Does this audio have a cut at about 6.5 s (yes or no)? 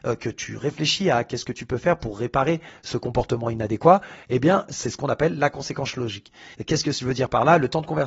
yes